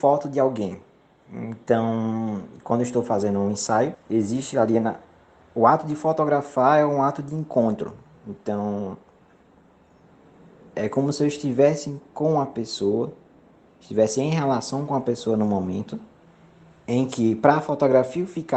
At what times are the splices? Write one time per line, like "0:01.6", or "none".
0:03.9